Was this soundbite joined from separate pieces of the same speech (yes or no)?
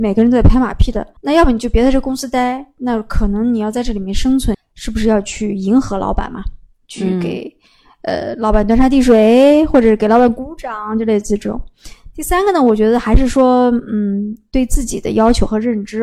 yes